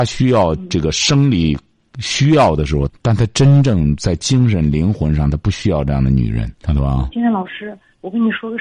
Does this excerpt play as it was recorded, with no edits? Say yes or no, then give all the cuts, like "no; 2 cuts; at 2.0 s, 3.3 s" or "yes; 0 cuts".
no; 2 cuts; at 2.9 s, 6.5 s